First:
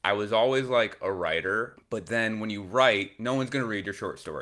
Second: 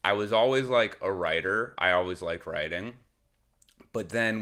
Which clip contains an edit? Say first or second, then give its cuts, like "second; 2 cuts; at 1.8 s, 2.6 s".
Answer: first; 1 cut; at 1.8 s